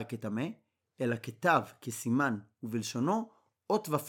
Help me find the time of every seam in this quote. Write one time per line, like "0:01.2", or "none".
none